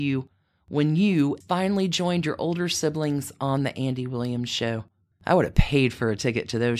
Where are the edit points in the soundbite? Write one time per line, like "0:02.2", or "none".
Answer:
0:01.4
0:05.1